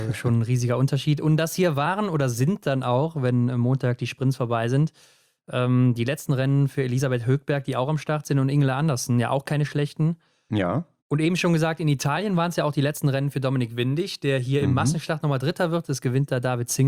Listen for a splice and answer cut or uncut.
uncut